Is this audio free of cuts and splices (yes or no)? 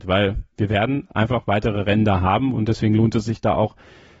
yes